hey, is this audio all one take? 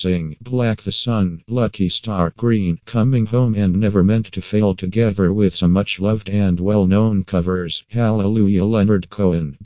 yes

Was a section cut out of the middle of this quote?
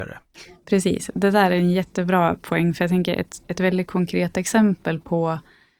no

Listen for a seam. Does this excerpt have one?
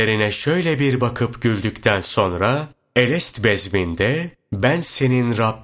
no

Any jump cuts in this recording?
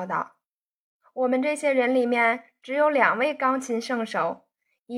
no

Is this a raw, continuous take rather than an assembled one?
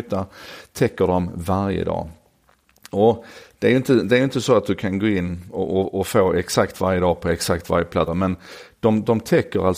no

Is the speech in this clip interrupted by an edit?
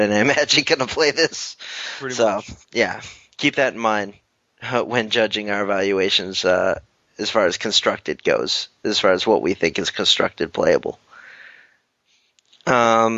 yes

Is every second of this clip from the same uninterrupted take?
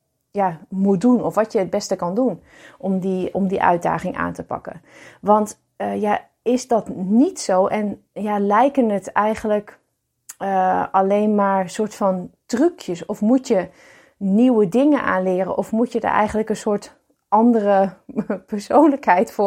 no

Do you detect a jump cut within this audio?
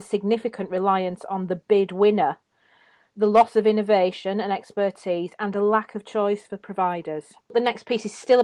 no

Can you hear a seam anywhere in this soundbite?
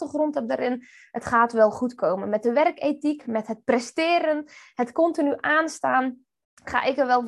no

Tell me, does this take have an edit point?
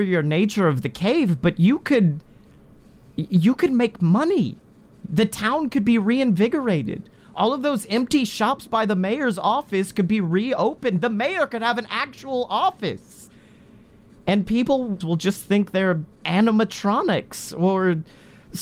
yes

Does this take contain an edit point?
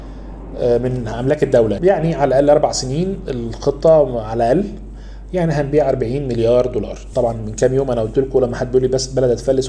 yes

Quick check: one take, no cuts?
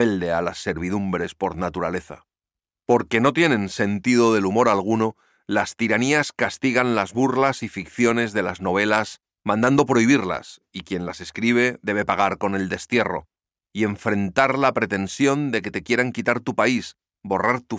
yes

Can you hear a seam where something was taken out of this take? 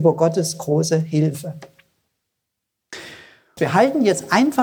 yes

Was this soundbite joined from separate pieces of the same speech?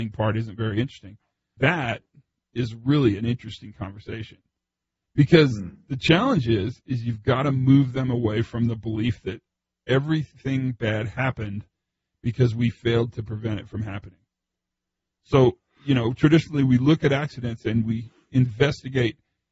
yes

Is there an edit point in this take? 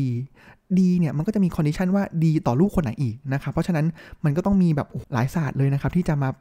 yes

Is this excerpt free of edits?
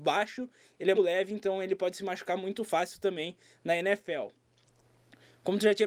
no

